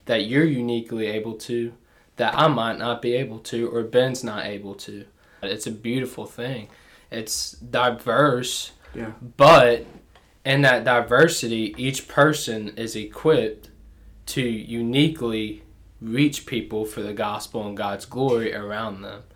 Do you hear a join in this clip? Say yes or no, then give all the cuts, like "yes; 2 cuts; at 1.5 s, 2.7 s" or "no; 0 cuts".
yes; 1 cut; at 5.4 s